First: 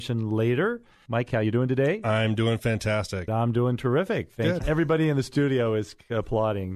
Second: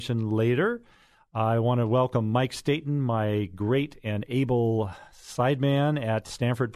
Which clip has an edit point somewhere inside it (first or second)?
first